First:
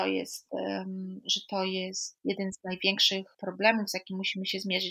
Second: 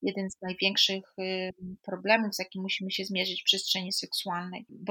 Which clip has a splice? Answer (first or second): first